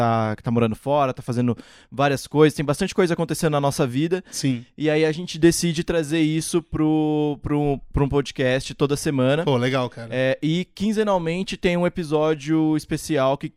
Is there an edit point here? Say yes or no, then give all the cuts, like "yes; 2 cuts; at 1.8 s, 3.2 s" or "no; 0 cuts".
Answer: no; 0 cuts